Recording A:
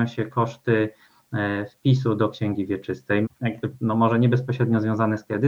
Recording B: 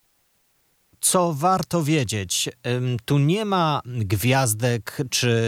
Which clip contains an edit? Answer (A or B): A